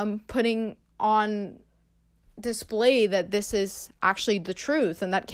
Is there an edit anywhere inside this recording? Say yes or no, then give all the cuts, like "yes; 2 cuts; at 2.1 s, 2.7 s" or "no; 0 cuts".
no; 0 cuts